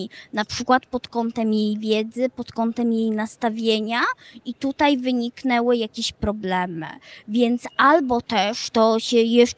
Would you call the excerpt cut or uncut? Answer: uncut